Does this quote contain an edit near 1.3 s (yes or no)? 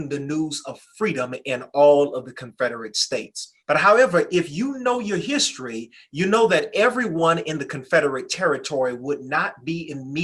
no